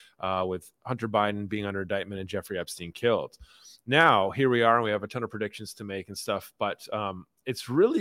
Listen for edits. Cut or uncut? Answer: uncut